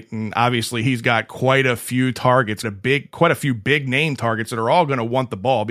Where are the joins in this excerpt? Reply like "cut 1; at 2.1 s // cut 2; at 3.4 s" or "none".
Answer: cut 1; at 2.6 s